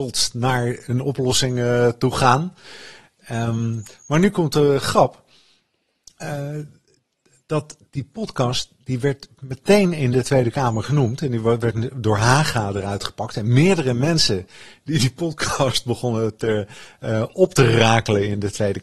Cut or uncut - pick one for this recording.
uncut